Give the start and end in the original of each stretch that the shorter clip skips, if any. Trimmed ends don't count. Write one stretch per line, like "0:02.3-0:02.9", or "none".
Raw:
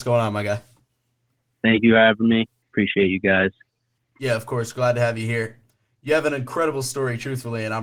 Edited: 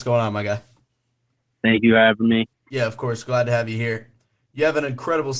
0:02.5-0:04.0